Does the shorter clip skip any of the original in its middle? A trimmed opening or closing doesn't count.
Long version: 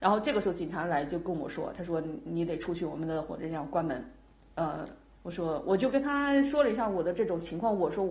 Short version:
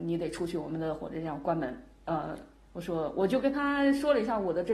yes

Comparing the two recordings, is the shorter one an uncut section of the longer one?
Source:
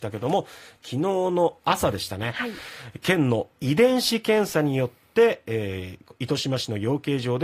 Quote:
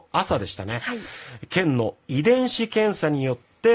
yes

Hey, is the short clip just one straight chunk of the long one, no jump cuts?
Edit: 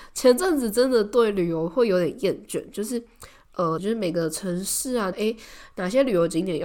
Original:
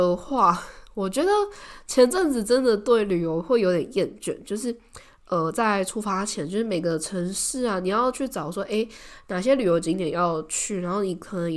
no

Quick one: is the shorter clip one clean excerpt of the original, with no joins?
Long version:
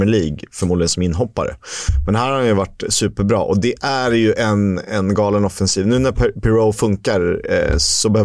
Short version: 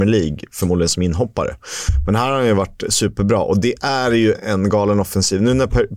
no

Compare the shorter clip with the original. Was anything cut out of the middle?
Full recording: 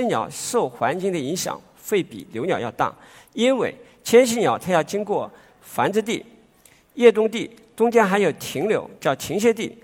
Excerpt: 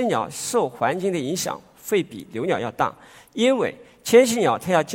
no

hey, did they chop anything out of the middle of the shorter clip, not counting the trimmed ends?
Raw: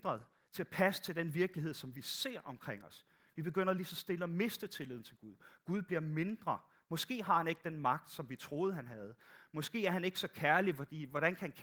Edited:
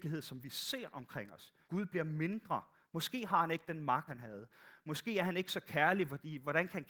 yes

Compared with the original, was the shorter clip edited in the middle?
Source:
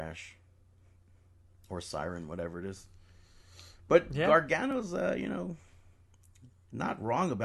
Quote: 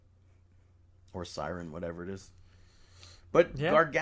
no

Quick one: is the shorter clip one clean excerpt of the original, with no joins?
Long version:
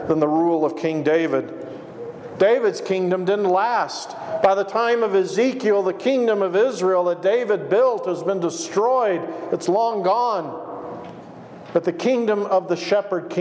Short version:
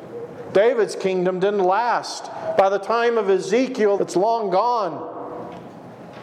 no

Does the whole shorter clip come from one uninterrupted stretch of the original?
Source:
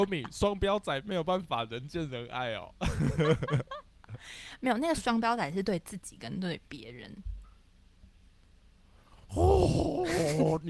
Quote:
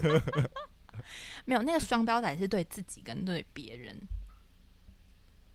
yes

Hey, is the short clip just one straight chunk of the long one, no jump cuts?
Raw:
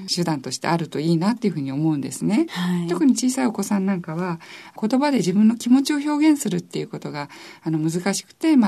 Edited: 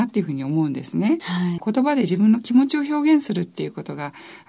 no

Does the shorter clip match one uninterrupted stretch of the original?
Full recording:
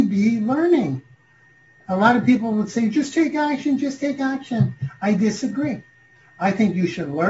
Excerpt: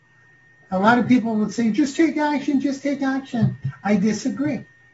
yes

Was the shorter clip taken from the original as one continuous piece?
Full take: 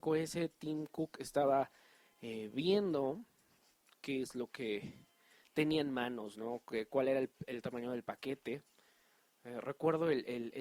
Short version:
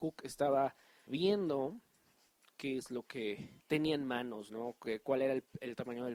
no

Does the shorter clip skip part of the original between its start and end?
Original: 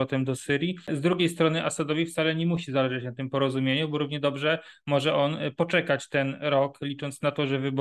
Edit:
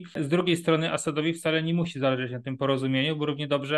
no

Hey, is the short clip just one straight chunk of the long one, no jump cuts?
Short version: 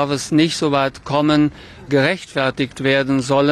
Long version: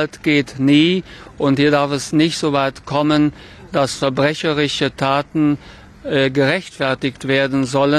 no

